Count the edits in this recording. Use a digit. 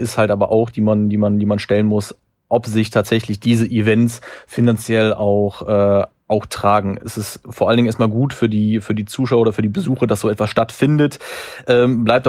0